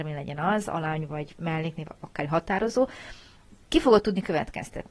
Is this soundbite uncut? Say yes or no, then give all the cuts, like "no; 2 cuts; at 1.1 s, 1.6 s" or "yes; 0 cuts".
yes; 0 cuts